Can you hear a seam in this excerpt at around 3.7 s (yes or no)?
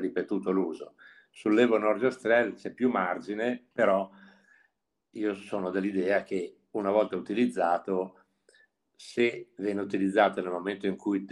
yes